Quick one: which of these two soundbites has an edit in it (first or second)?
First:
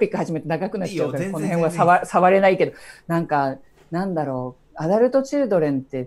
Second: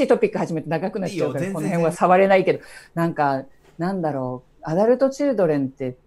second